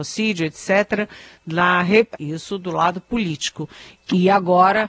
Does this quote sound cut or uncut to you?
cut